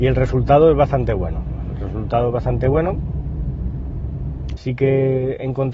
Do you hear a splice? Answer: yes; 1 cut; at 4.6 s

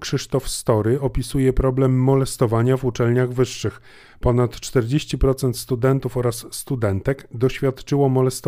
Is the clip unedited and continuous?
yes; 0 cuts

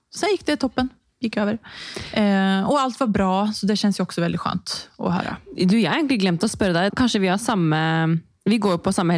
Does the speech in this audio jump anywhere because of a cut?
yes; 1 cut; at 6.9 s

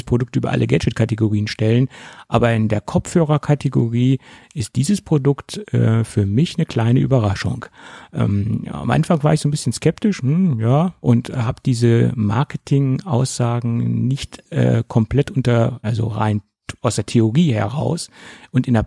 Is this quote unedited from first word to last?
no; 2 cuts; at 11.0 s, 15.8 s

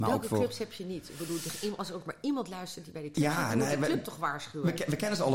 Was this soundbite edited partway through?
no; 0 cuts

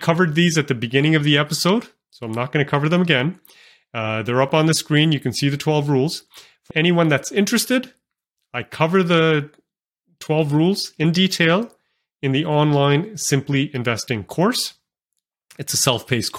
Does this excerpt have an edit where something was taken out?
yes; 1 cut; at 6.7 s

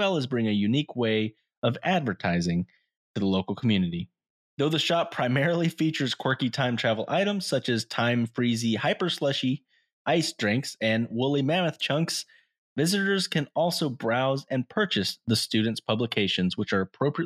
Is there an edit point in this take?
no; 0 cuts

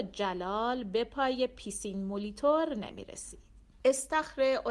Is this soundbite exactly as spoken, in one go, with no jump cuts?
no; 1 cut; at 3.8 s

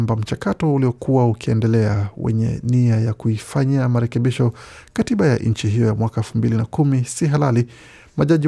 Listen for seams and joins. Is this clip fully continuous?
yes; 0 cuts

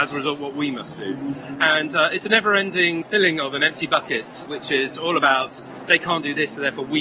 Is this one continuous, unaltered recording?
no; 2 cuts; at 3.0 s, 4.5 s

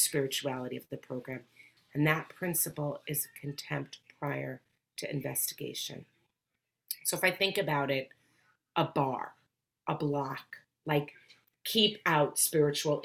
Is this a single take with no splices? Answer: no; 1 cut; at 1.8 s

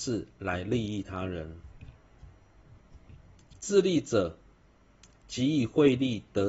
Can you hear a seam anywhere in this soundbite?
yes; 1 cut; at 3.6 s

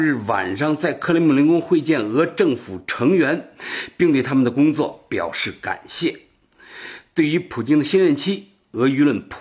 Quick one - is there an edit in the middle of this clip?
no; 0 cuts

